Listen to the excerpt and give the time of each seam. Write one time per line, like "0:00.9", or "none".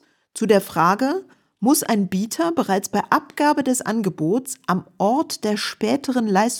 none